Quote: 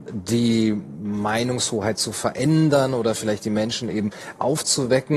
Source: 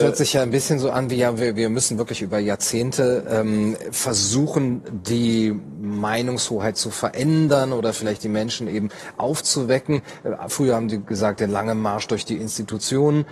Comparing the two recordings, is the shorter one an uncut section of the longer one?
yes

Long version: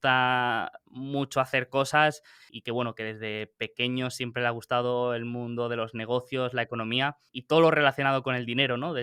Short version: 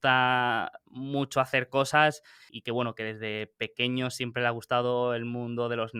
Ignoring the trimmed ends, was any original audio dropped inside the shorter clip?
no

